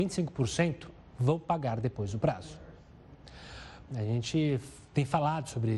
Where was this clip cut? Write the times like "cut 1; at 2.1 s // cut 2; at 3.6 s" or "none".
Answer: cut 1; at 3.9 s